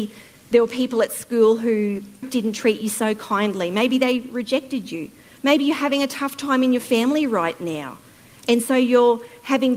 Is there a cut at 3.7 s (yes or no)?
no